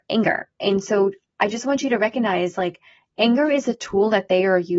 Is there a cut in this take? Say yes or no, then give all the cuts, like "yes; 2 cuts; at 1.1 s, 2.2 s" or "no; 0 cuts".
no; 0 cuts